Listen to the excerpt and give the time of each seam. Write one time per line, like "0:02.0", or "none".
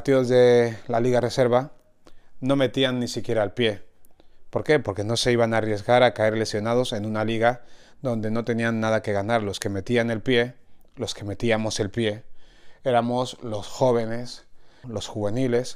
0:14.8